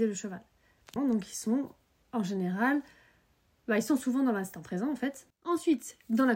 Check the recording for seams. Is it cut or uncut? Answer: cut